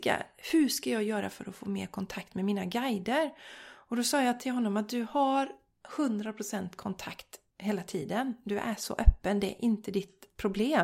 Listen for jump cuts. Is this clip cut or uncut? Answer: uncut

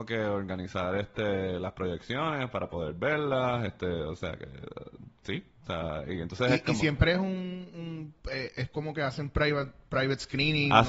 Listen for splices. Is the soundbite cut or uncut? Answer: uncut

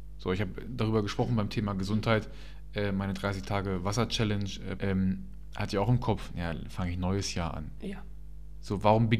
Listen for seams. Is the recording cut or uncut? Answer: cut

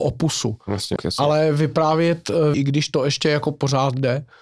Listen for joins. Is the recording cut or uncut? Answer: cut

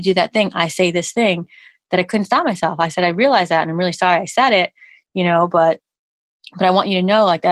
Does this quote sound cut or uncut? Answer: uncut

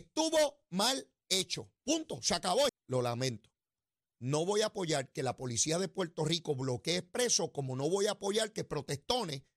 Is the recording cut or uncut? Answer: cut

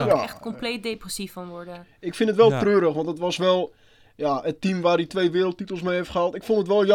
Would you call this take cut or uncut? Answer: uncut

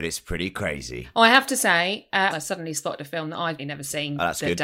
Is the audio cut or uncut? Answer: cut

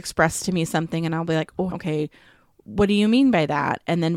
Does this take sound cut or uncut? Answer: cut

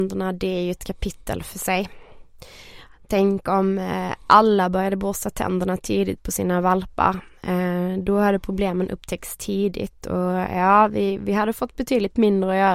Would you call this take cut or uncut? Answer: uncut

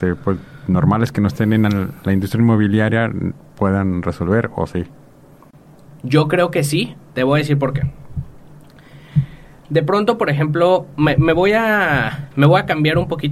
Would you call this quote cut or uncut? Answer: uncut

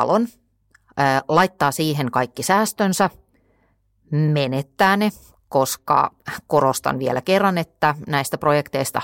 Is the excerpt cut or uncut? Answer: uncut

